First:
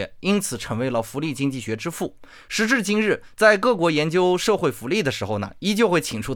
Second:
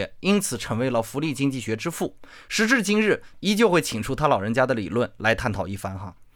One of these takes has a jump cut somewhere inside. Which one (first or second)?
second